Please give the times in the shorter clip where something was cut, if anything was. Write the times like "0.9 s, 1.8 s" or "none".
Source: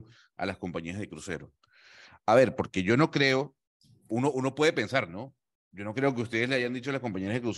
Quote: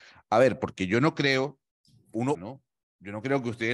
2.3 s